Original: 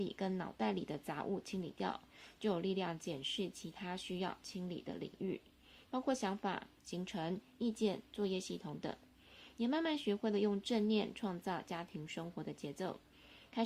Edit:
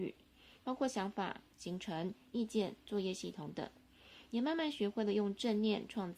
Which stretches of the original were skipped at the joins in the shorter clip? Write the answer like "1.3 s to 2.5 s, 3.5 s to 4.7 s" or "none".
none